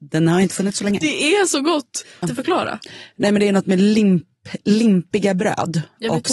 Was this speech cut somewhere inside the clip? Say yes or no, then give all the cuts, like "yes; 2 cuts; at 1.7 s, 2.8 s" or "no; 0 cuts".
yes; 2 cuts; at 1.0 s, 2.2 s